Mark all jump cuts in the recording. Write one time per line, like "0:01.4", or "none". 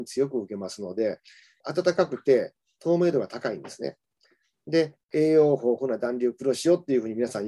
0:05.0

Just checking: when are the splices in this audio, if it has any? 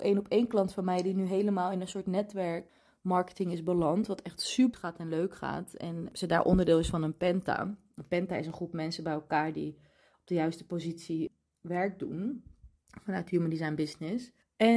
none

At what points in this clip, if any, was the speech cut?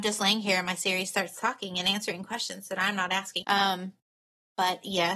0:03.4

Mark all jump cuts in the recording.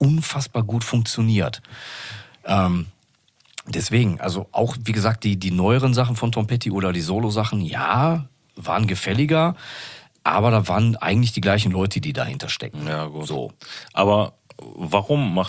none

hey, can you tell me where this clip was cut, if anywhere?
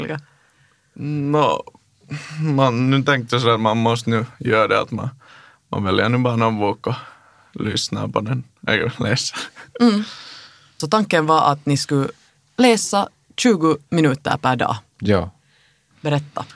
none

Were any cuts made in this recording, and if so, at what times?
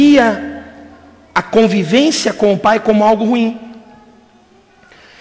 none

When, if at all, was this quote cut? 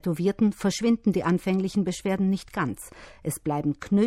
none

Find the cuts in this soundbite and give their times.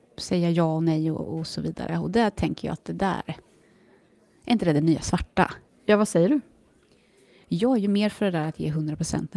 0:05.7

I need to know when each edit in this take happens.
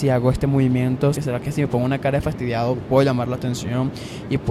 0:01.1

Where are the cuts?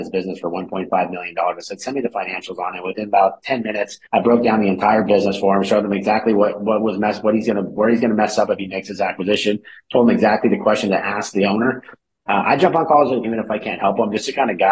0:04.1
0:12.1
0:13.2

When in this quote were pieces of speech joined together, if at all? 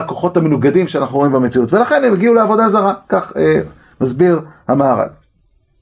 none

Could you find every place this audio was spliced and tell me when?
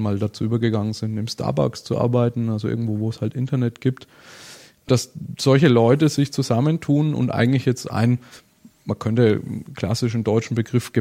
none

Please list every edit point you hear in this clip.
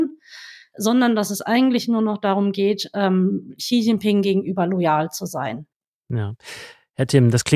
none

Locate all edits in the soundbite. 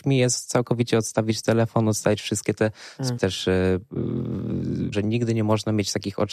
0:03.2
0:04.9

